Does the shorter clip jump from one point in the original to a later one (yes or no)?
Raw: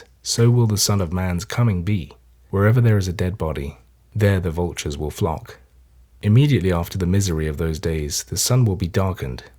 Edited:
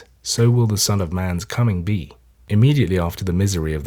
yes